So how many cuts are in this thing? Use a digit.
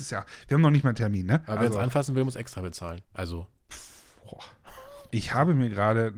2